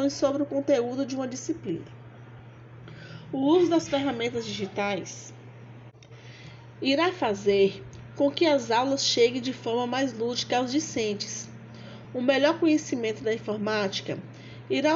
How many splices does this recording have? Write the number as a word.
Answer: zero